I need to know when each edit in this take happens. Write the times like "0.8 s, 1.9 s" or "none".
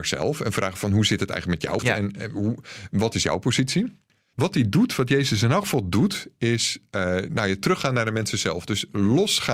1.8 s, 4.3 s